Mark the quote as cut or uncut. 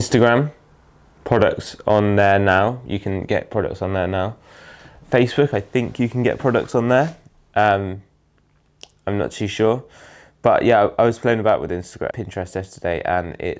cut